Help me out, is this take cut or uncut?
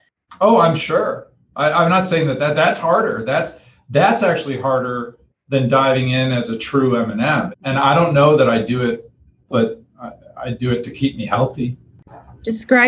cut